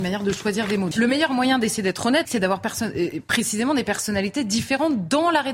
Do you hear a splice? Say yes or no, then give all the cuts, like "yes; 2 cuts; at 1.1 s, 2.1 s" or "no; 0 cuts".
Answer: yes; 2 cuts; at 0.9 s, 2.2 s